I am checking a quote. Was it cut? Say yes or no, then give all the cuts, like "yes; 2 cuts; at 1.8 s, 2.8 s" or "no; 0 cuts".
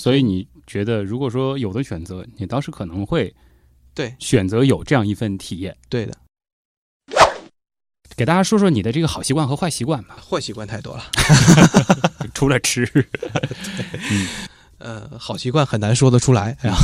no; 0 cuts